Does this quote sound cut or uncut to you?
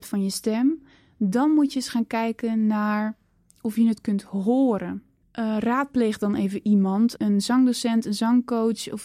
cut